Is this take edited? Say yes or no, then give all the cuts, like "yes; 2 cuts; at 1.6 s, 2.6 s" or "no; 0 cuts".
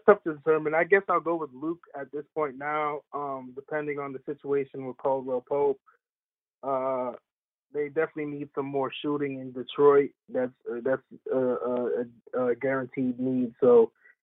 yes; 1 cut; at 10.6 s